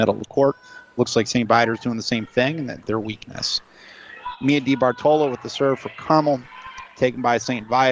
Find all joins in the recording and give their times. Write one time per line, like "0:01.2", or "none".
0:02.8